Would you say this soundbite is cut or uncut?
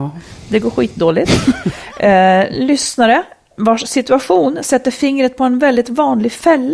uncut